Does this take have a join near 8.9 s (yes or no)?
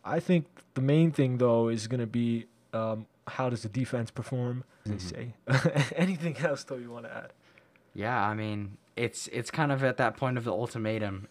no